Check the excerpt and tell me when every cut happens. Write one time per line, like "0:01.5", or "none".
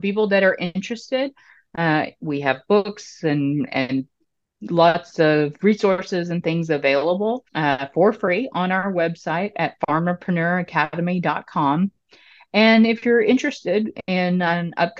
0:07.5